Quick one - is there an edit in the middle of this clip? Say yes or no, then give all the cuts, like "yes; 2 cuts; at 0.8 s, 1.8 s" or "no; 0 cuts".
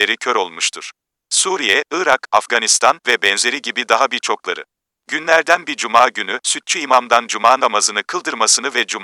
yes; 2 cuts; at 5.0 s, 6.4 s